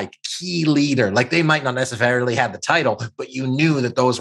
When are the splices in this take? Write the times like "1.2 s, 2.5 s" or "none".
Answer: none

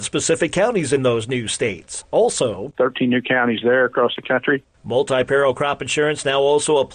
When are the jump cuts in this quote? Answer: 2.7 s

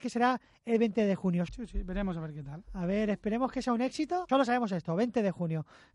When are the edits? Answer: 1.5 s, 4.3 s

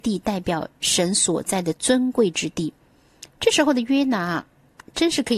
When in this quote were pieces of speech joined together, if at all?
3.3 s

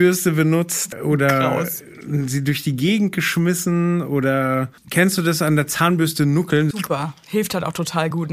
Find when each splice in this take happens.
4.8 s, 6.7 s

